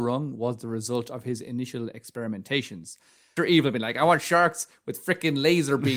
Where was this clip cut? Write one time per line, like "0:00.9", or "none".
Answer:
0:03.4